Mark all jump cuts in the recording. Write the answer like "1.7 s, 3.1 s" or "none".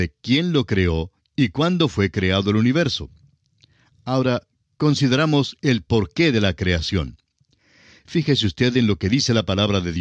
none